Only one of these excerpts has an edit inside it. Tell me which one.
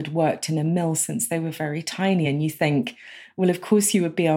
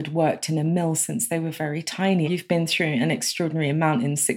second; 1 cut; at 2.2 s

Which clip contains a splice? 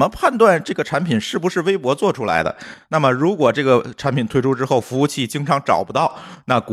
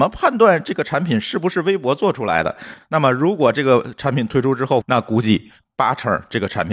second; 1 cut; at 4.8 s

